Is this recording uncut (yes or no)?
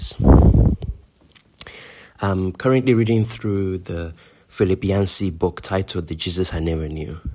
yes